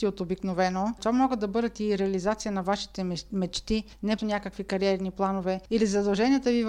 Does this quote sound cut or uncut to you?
cut